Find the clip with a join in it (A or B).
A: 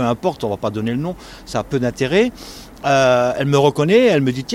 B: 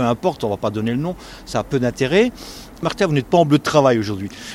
B